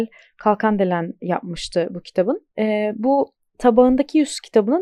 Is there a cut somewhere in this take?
yes; 1 cut; at 2.5 s

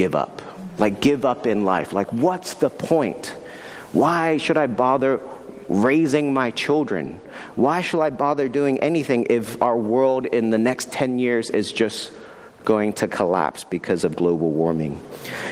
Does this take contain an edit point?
no; 0 cuts

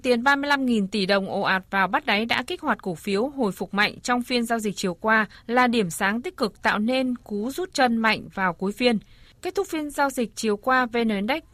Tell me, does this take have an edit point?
no; 0 cuts

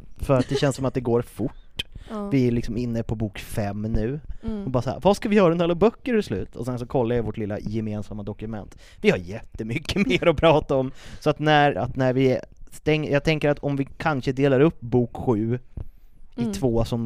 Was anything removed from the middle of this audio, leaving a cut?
yes; 1 cut; at 11.7 s

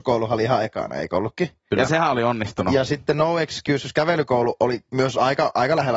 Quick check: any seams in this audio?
no; 0 cuts

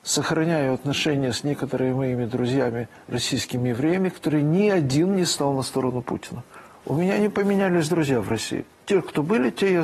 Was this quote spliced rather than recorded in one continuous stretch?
no; 0 cuts

